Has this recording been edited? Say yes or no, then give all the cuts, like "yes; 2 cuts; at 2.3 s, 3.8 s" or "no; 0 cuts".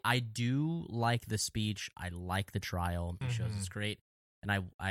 yes; 1 cut; at 3.2 s